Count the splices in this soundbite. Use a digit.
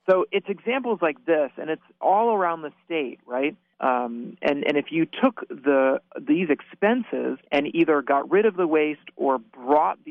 2